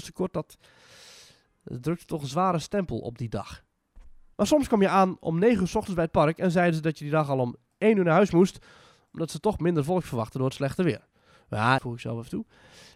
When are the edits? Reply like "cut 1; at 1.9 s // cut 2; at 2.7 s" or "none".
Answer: cut 1; at 4.3 s // cut 2; at 11.8 s